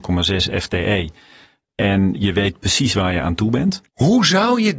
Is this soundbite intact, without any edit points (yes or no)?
no